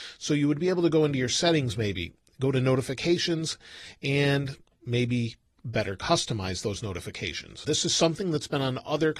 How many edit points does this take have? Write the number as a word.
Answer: one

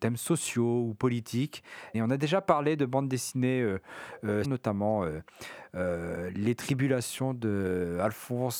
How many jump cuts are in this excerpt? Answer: two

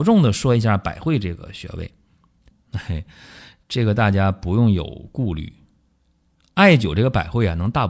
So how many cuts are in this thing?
one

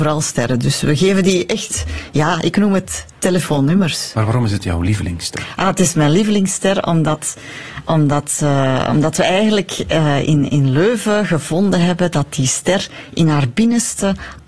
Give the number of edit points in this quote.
zero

